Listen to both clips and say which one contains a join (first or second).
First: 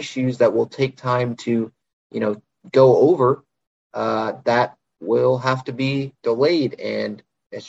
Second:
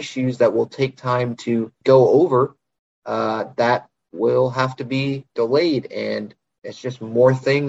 second